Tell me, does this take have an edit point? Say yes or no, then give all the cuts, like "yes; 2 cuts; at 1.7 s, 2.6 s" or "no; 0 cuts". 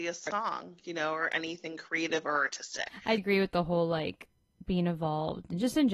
yes; 1 cut; at 3.2 s